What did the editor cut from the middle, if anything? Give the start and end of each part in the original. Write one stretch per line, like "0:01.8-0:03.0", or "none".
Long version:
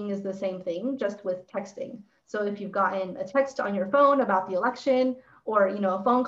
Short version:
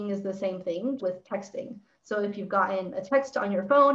0:01.0-0:01.2